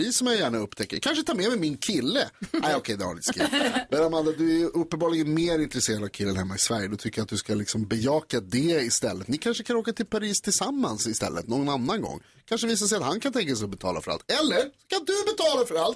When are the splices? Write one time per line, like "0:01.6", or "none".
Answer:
0:02.6